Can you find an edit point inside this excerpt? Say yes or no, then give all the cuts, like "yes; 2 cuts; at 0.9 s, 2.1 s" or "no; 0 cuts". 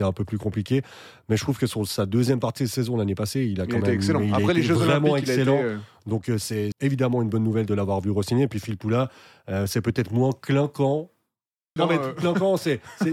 yes; 2 cuts; at 6.7 s, 11.8 s